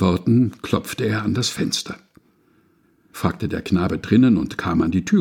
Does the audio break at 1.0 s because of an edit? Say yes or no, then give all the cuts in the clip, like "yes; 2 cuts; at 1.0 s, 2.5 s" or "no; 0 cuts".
no; 1 cut; at 3.1 s